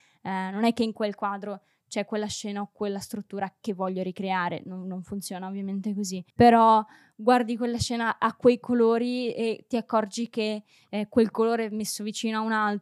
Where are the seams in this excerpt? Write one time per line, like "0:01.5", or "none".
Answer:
0:06.3